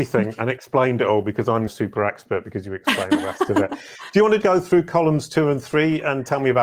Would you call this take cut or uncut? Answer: cut